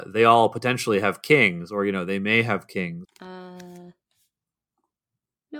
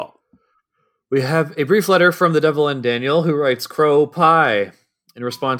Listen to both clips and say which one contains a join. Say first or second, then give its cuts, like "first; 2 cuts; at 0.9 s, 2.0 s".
first; 1 cut; at 3.0 s